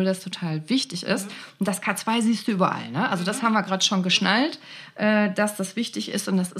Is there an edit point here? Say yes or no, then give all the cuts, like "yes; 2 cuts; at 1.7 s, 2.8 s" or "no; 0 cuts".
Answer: no; 0 cuts